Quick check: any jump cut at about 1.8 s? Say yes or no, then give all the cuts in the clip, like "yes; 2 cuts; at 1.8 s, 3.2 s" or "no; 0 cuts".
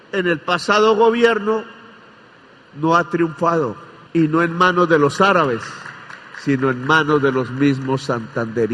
no; 1 cut; at 4.1 s